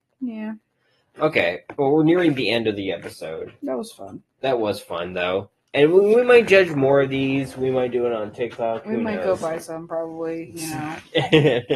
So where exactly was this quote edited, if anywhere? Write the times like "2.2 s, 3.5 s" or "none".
none